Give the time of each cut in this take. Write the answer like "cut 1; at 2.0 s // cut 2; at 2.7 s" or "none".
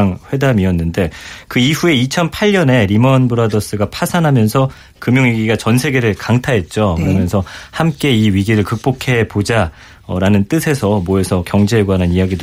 none